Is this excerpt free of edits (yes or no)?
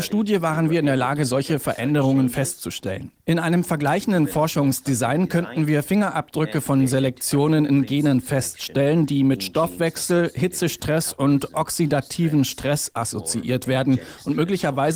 yes